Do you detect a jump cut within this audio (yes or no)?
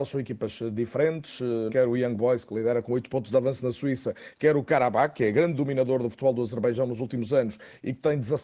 yes